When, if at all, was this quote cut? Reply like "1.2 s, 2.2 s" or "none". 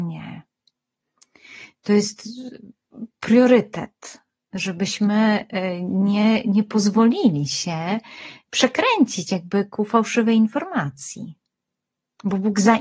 none